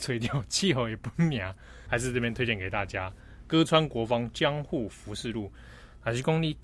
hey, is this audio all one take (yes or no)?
no